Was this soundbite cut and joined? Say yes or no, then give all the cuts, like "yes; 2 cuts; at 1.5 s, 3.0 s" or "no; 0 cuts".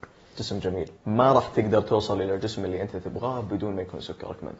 yes; 1 cut; at 1.0 s